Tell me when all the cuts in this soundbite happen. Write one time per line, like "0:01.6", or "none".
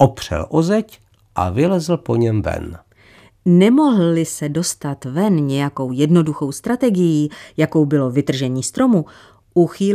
none